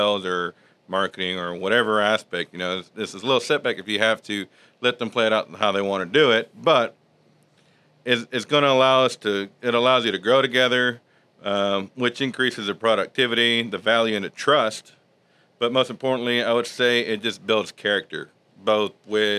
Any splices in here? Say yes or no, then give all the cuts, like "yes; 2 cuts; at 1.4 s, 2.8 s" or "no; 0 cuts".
no; 0 cuts